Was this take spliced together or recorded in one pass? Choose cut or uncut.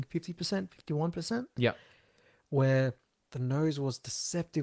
uncut